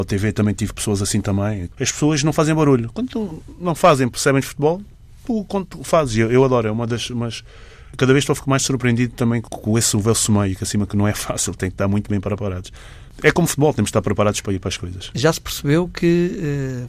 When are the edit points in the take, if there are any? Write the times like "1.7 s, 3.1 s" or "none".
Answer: 1.7 s